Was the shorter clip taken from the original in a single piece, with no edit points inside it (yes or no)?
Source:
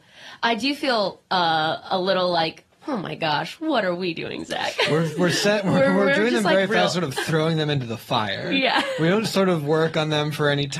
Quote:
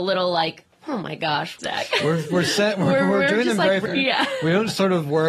no